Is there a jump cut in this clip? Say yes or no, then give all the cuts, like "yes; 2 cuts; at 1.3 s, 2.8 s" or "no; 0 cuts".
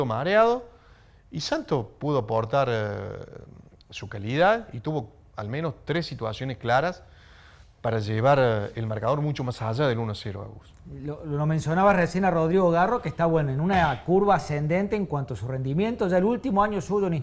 no; 0 cuts